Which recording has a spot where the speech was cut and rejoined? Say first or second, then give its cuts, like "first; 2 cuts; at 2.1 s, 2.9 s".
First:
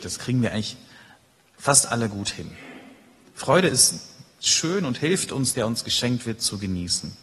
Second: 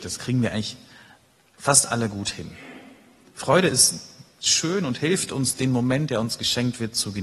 first; 1 cut; at 5.5 s